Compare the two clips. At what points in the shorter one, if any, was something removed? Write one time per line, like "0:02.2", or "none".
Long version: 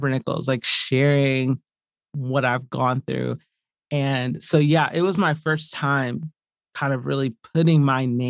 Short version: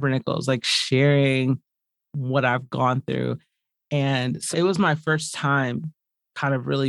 0:04.5